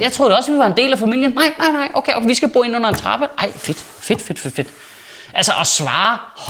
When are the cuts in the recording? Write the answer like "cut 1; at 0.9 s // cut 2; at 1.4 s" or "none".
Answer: none